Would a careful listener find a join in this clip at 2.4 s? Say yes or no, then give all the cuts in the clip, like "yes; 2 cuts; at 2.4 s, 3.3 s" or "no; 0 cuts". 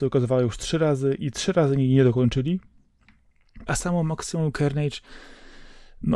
no; 2 cuts; at 1.2 s, 3.7 s